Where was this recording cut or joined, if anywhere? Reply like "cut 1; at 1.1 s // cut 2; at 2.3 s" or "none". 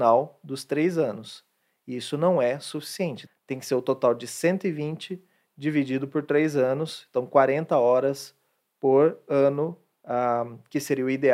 cut 1; at 3.3 s